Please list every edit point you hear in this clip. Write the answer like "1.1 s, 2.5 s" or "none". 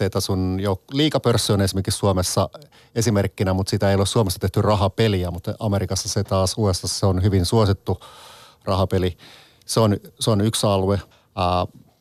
11.1 s